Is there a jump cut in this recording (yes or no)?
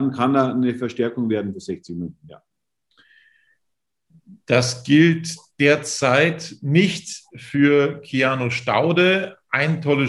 no